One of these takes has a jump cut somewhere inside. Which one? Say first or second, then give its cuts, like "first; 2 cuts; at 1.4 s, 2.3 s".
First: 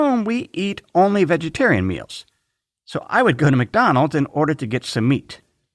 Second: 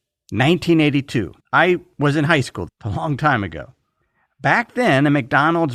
second; 2 cuts; at 1.4 s, 2.7 s